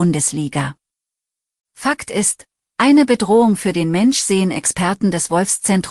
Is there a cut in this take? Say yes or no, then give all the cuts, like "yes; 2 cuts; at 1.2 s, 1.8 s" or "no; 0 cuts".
yes; 1 cut; at 1.7 s